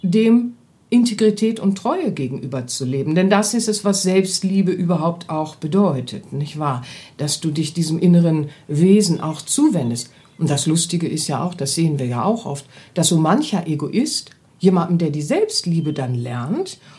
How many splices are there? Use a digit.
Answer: 0